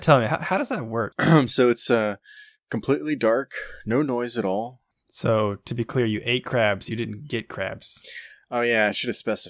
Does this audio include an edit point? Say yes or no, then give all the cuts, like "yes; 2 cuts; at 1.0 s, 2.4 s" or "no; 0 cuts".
yes; 2 cuts; at 1.1 s, 4.9 s